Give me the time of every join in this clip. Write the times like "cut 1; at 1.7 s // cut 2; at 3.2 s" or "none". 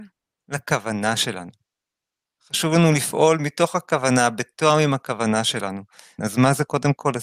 cut 1; at 6.2 s